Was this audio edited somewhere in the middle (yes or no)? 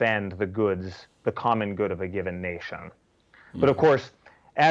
no